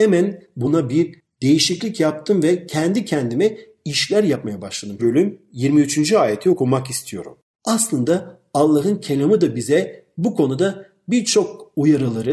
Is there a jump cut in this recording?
yes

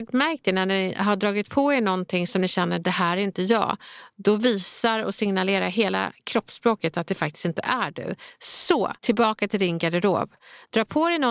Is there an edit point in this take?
yes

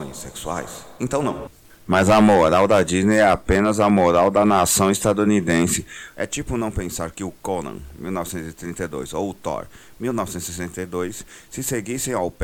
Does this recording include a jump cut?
yes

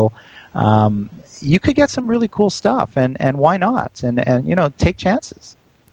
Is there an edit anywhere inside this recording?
no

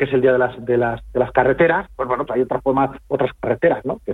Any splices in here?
yes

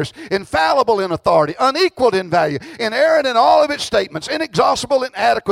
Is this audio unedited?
yes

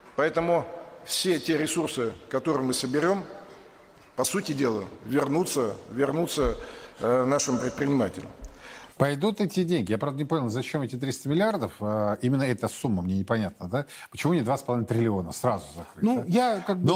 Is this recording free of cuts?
no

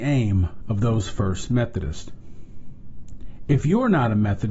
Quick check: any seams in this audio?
no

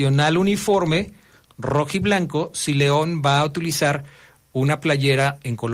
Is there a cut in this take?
no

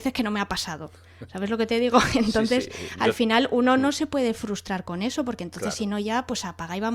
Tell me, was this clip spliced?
no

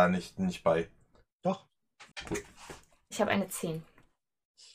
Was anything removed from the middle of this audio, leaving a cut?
yes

